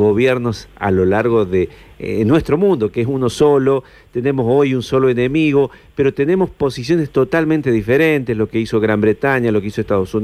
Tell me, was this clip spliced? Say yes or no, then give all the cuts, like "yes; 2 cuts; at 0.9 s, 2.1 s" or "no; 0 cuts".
no; 0 cuts